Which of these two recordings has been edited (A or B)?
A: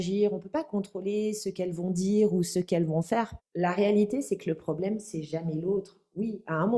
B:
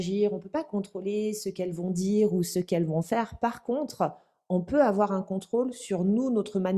A